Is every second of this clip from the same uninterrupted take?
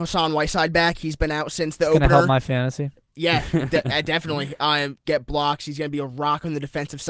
no; 1 cut; at 5.0 s

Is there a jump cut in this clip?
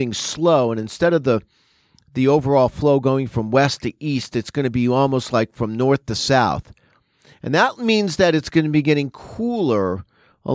no; 0 cuts

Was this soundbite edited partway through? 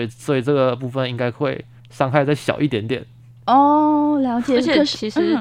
no; 0 cuts

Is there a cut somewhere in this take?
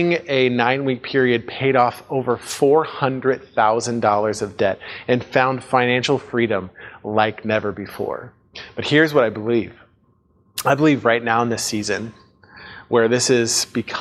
no; 0 cuts

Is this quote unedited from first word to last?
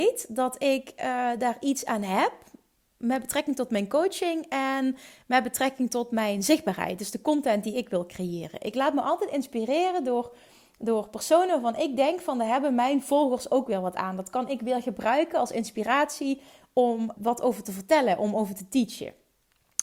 no; 1 cut; at 17.2 s

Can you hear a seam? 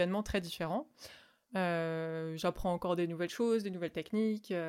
yes; 1 cut; at 1.5 s

